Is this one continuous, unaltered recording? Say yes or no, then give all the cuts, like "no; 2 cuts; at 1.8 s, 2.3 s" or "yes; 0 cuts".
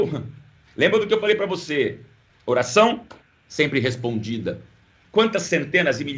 no; 2 cuts; at 2.3 s, 5.1 s